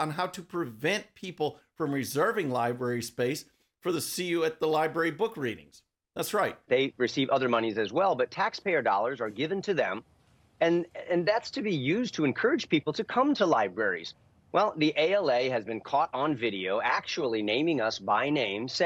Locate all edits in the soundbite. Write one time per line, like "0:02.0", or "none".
0:06.7